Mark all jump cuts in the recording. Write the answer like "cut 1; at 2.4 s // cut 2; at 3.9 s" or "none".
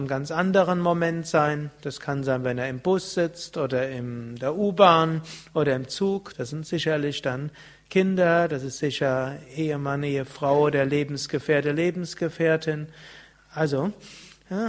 cut 1; at 6.3 s // cut 2; at 13.3 s